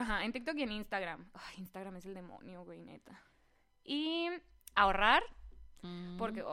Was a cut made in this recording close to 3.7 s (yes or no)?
no